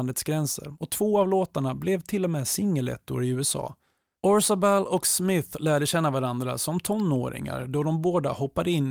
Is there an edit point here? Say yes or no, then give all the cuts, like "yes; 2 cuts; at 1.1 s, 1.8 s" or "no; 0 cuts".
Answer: yes; 1 cut; at 4.2 s